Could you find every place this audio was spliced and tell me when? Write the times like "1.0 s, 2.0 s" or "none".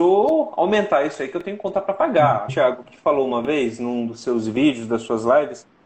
2.5 s